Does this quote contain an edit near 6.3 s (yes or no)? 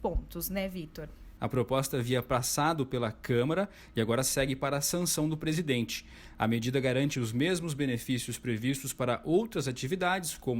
no